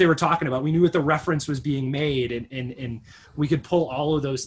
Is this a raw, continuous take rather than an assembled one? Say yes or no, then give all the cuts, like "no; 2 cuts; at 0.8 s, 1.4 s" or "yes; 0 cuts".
yes; 0 cuts